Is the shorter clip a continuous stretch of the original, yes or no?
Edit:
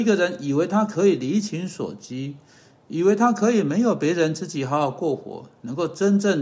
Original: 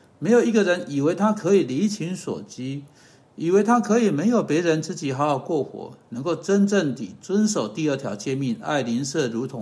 yes